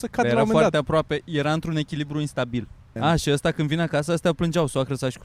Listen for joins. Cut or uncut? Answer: cut